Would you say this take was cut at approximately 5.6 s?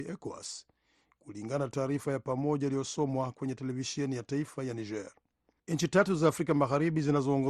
yes; 1 cut; at 5.6 s

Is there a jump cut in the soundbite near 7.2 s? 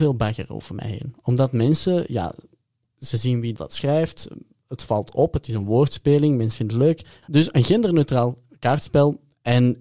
yes; 2 cuts; at 3.5 s, 7.2 s

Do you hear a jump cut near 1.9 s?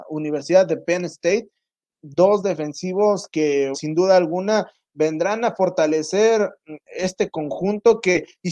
no; 2 cuts; at 3.7 s, 6.9 s

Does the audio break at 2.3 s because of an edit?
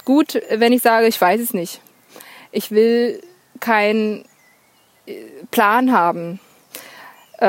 no; 0 cuts

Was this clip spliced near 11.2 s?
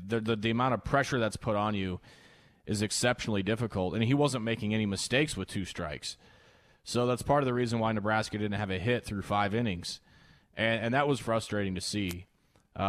yes; 1 cut; at 11.2 s

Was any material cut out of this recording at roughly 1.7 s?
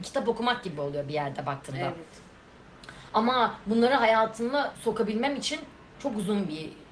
no; 1 cut; at 5.9 s

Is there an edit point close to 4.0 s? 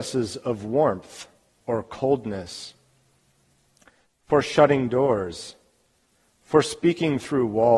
yes; 1 cut; at 4.0 s

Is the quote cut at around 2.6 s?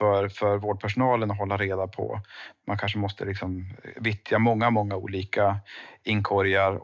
no; 0 cuts

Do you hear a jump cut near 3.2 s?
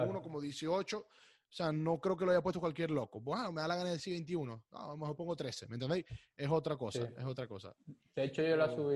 no; 0 cuts

